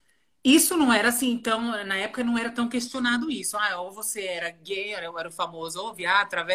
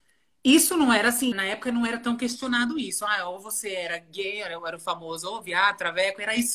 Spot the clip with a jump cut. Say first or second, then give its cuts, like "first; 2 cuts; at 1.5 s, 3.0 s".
second; 1 cut; at 1.3 s